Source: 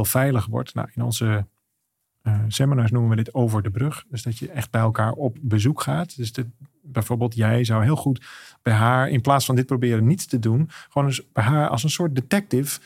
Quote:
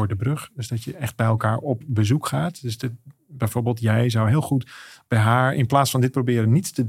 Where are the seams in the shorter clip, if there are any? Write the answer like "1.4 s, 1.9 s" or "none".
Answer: none